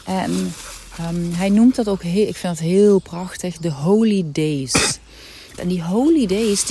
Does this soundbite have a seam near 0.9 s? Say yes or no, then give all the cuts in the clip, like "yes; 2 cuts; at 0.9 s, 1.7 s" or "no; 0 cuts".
no; 1 cut; at 5.6 s